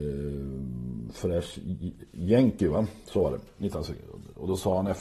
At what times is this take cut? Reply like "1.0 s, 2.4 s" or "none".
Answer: none